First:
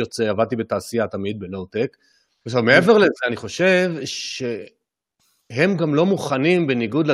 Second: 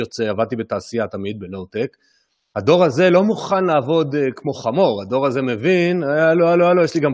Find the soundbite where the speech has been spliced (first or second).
first